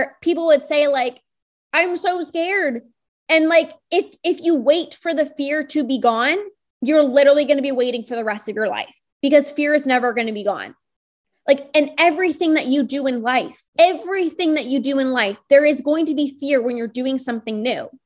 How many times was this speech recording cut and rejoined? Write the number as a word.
one